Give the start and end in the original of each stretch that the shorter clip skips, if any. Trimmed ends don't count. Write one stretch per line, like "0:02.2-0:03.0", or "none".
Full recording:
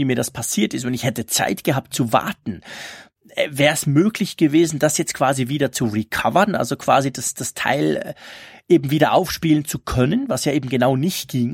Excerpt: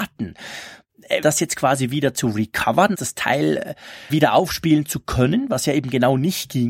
0:03.5-0:04.8
0:06.5-0:07.3
0:08.5-0:08.9